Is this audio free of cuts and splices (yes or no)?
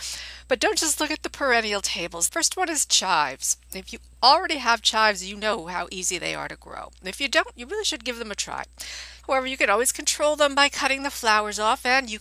no